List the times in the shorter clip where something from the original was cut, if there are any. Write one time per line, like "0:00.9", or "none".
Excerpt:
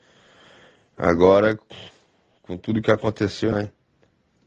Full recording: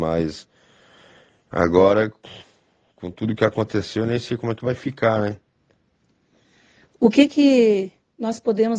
0:03.5

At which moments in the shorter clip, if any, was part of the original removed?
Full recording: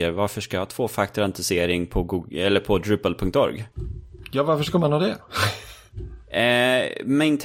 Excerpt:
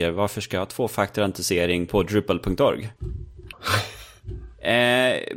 0:01.9
0:03.5

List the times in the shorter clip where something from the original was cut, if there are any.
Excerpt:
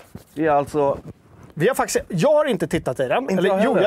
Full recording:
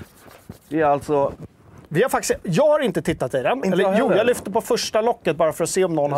none

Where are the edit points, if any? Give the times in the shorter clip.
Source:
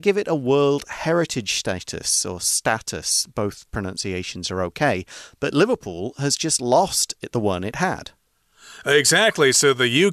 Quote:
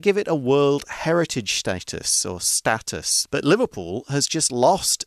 0:03.3

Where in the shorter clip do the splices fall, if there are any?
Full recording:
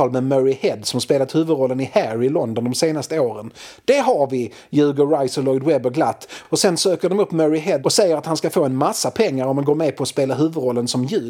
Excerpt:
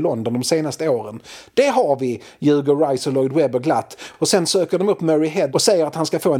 none

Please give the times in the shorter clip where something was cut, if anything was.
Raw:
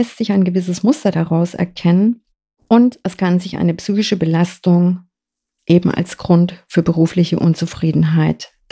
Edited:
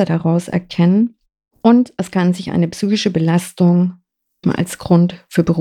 0:04.4

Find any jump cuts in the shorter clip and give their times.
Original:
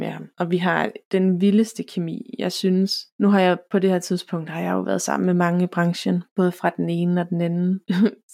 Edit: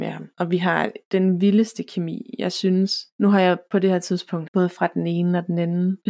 0:04.5

